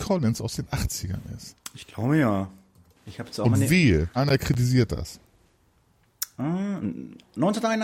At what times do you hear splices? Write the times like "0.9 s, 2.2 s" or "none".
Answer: 3.0 s, 4.2 s